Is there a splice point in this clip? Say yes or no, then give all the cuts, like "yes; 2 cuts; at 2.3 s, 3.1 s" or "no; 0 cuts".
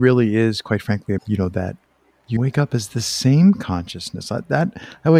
yes; 2 cuts; at 1.2 s, 2.4 s